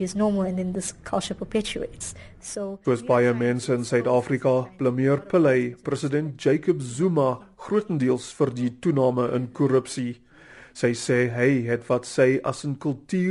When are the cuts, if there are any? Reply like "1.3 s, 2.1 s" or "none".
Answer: 2.8 s